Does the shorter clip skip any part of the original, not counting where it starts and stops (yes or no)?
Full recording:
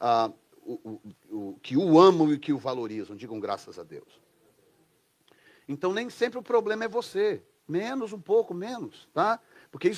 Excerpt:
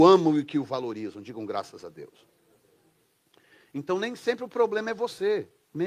no